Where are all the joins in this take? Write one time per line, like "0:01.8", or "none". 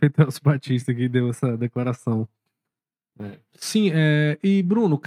0:03.5